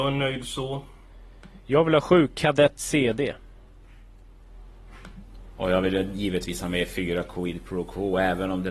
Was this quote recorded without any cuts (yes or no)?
yes